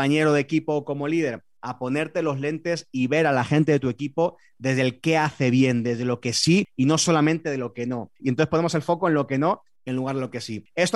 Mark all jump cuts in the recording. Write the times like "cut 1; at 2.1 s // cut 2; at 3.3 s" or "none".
cut 1; at 8.2 s